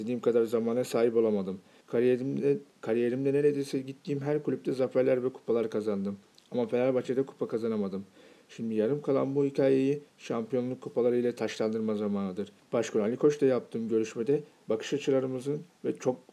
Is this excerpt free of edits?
no; 2 cuts; at 1.8 s, 12.6 s

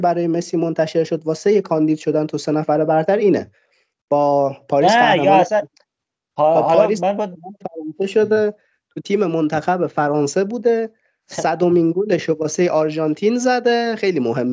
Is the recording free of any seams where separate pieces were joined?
yes; 0 cuts

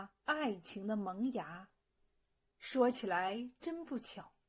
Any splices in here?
yes; 1 cut; at 2.5 s

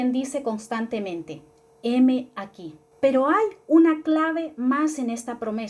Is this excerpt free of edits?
no; 1 cut; at 2.9 s

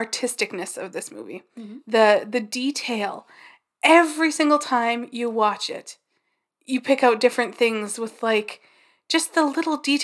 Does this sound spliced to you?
no; 0 cuts

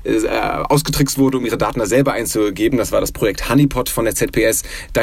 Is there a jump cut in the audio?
no; 0 cuts

